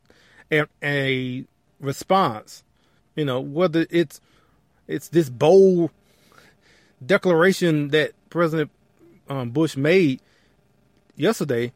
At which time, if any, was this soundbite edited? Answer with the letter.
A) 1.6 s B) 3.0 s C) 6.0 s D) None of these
B